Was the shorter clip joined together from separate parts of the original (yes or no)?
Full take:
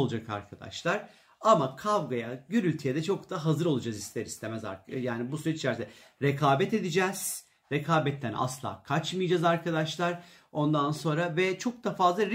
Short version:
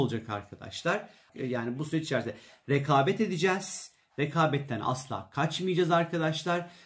yes